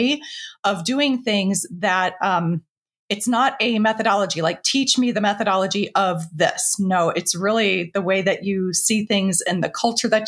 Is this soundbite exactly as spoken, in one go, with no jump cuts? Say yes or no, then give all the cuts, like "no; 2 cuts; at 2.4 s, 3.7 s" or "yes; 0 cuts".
yes; 0 cuts